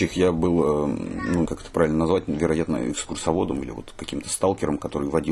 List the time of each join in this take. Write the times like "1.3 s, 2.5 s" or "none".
1.5 s